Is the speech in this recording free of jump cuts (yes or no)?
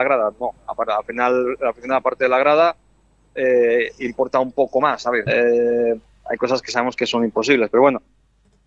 no